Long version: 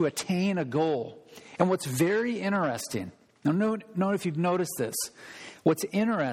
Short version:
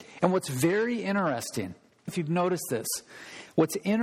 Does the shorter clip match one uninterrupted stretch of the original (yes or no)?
no